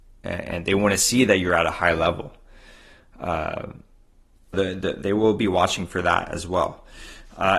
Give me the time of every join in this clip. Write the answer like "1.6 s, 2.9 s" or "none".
4.5 s